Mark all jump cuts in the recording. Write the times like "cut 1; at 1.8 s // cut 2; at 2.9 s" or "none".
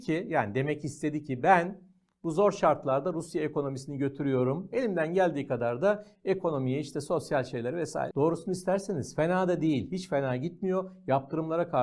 cut 1; at 8.1 s